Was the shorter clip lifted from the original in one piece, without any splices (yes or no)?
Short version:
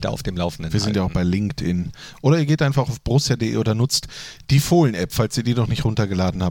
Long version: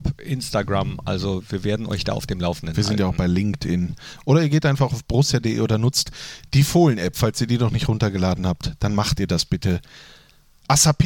yes